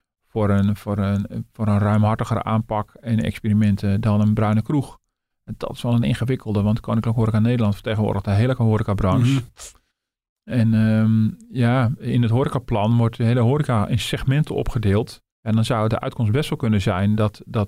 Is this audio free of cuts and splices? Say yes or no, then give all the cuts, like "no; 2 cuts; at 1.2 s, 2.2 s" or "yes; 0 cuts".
no; 1 cut; at 15.3 s